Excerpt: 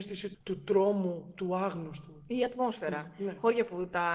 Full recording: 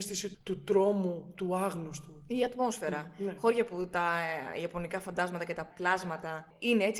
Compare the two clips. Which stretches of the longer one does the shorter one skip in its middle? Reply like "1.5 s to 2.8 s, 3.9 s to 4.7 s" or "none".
none